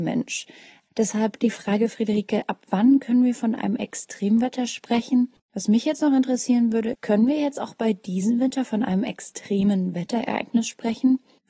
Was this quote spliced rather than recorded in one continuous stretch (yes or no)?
yes